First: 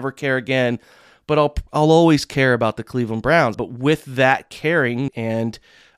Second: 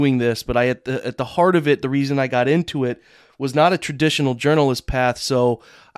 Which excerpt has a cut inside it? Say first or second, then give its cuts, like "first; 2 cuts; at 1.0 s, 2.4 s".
first; 2 cuts; at 3.5 s, 5.1 s